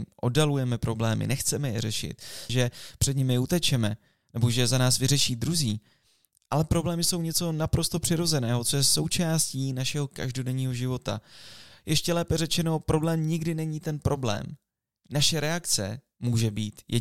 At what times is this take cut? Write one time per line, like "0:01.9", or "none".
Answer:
0:02.5